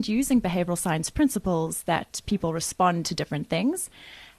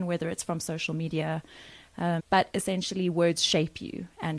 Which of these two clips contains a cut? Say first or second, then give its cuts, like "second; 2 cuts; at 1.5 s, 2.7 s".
second; 1 cut; at 2.2 s